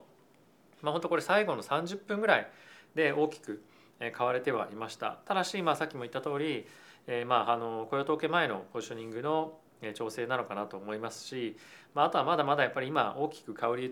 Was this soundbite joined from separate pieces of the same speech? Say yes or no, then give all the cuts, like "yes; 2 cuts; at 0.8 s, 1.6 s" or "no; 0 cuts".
no; 0 cuts